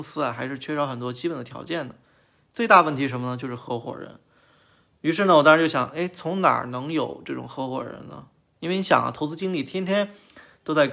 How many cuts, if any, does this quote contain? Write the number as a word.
one